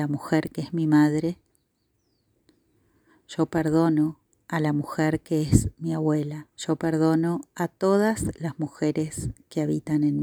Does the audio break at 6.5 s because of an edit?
yes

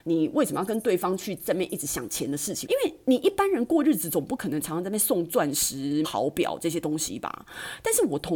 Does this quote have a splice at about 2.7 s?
yes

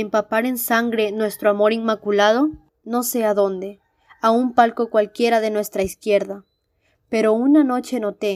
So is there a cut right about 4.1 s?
no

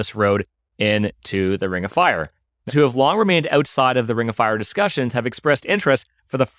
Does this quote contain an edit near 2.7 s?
yes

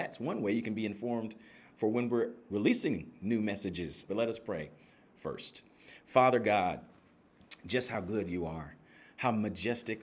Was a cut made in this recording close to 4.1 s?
yes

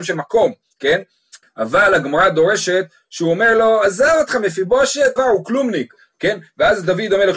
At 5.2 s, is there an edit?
yes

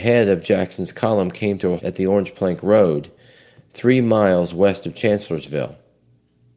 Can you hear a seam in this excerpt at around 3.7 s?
no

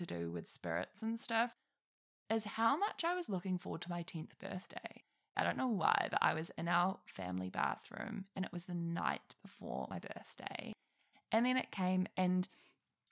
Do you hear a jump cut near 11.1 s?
yes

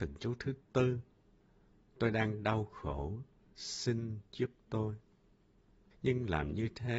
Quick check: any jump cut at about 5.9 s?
yes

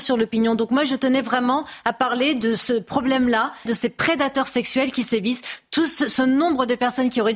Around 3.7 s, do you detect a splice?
yes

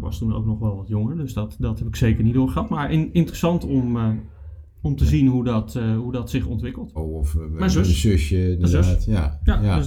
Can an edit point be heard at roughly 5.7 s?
no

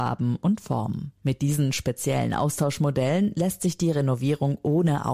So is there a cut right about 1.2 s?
yes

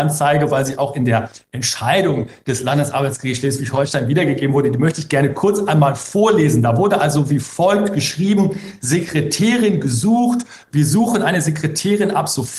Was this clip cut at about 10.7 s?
yes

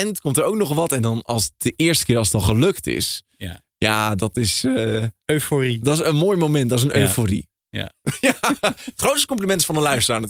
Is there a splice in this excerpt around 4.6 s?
no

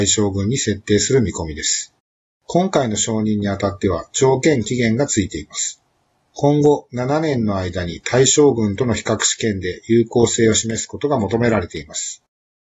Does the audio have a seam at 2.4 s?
yes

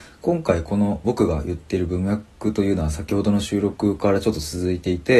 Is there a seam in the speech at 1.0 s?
yes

